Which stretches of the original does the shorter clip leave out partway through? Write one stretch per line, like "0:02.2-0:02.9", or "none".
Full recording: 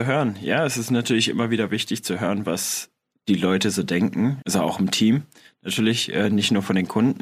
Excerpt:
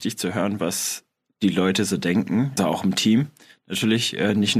0:04.4-0:04.5